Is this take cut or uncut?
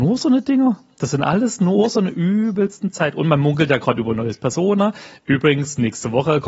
uncut